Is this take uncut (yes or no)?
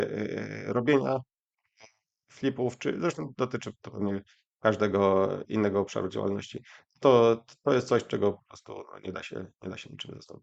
yes